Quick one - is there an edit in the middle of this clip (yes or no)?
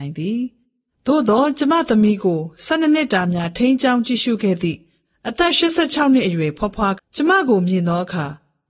yes